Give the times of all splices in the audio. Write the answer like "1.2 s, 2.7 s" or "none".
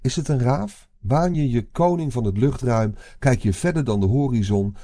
none